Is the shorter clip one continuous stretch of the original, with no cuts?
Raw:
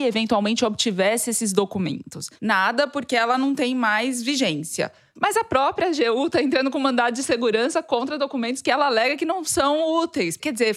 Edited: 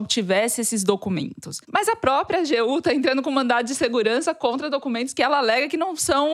no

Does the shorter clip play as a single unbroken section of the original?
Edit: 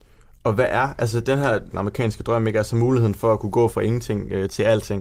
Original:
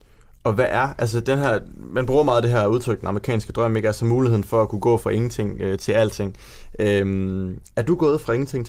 no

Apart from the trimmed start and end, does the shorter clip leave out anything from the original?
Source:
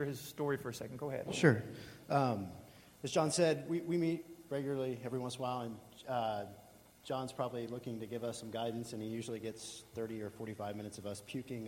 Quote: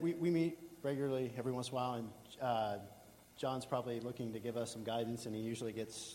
no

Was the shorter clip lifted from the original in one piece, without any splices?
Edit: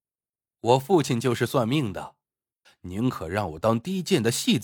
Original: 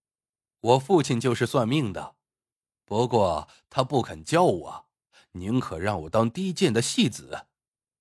no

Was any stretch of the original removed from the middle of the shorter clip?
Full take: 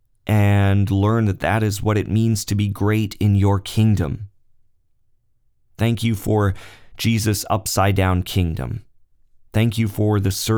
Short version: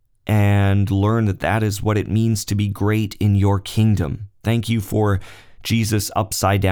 yes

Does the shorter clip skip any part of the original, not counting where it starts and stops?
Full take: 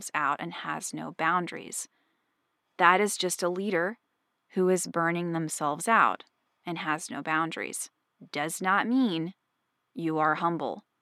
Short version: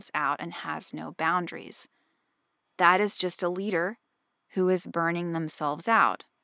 no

